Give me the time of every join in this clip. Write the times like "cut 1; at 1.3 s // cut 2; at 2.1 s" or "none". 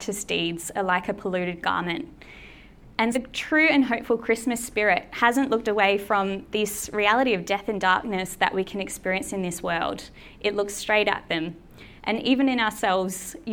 cut 1; at 3.1 s

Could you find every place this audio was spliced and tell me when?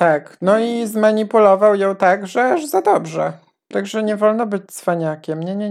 cut 1; at 3.7 s

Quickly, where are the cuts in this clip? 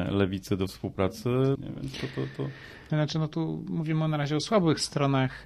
cut 1; at 1.6 s // cut 2; at 2.9 s

